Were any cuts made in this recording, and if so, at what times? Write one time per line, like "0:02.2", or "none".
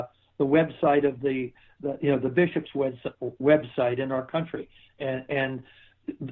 0:04.9